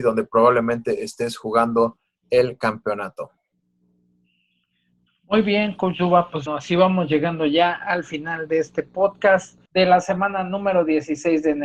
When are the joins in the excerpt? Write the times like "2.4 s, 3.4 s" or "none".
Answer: 6.5 s, 9.7 s

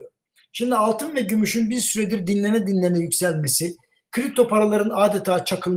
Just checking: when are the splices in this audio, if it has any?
none

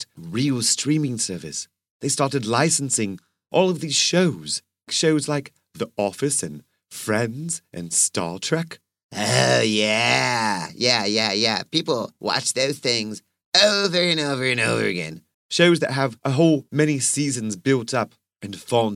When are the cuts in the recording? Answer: 15.3 s

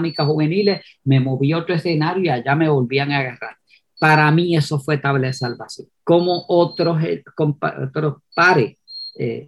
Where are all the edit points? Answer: 6.0 s

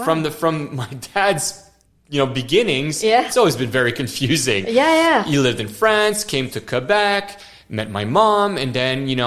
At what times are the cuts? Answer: none

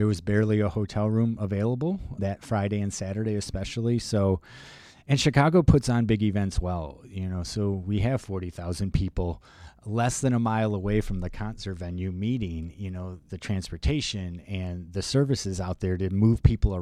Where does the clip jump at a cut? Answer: 13.3 s

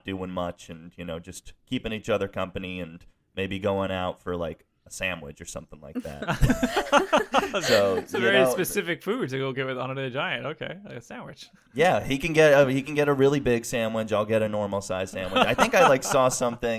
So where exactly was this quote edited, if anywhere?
none

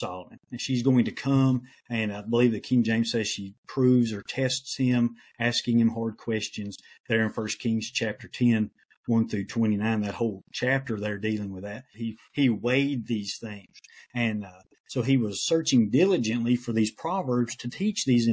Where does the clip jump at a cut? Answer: 11.9 s

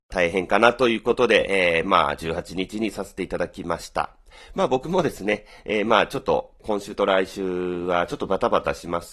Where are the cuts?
none

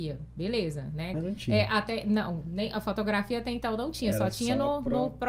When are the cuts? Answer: 1.1 s

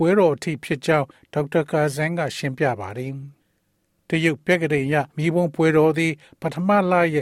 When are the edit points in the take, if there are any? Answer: 3.4 s, 5.1 s

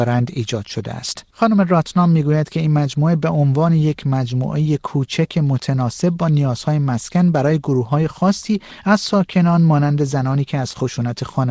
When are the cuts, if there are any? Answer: 1.3 s

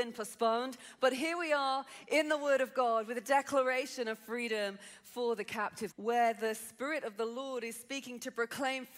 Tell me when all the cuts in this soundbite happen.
5.9 s

